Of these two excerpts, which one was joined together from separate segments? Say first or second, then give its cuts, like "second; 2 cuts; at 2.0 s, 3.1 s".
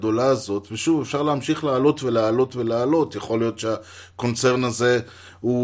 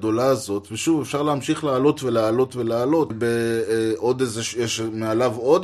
second; 1 cut; at 3.1 s